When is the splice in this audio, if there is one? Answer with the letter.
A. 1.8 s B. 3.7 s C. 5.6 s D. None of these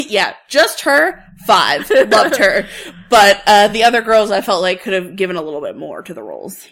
D